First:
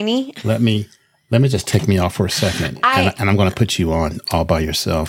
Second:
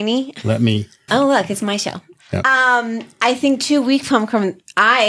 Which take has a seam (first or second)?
second